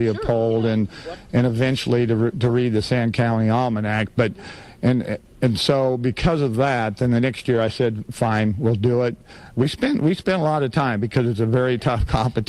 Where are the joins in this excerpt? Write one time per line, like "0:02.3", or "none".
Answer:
none